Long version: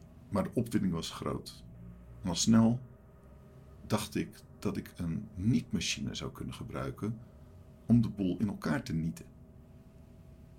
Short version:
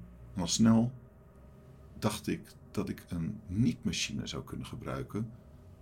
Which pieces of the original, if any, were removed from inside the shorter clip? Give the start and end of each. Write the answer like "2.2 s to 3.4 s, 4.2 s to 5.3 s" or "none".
none